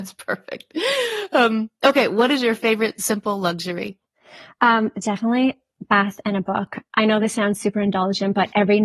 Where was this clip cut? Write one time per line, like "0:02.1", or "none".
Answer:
none